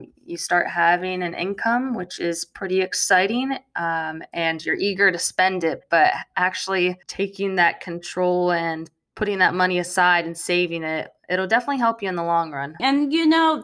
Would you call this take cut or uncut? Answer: cut